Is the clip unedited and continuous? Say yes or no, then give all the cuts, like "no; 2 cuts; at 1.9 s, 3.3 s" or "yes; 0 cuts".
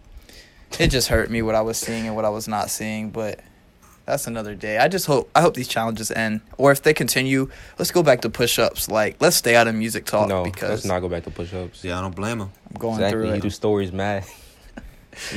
no; 2 cuts; at 11.8 s, 13.4 s